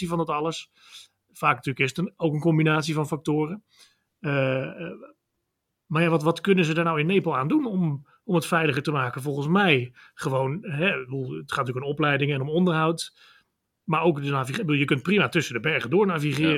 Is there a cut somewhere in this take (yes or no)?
no